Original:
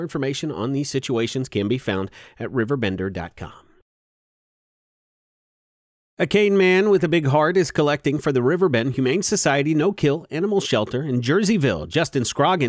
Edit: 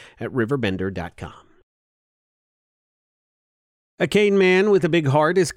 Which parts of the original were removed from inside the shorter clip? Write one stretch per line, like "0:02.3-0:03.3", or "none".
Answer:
none